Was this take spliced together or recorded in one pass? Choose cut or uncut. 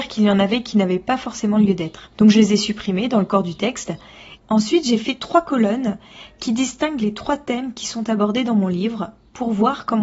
cut